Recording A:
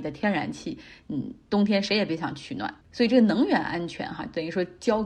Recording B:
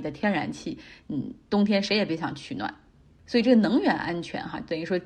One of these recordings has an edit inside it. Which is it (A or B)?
A